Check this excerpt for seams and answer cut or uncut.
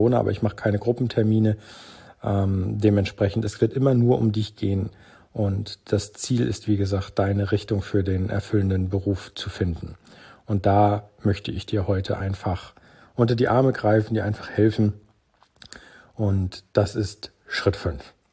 uncut